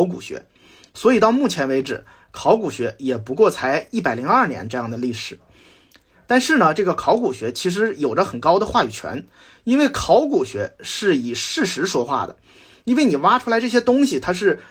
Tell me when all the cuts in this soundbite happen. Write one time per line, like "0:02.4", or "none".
none